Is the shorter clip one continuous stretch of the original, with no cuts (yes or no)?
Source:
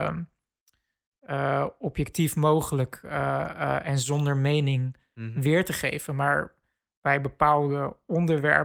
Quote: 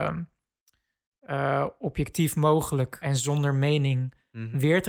no